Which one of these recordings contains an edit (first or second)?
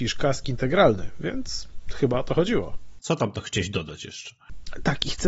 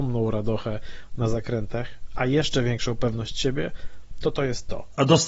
first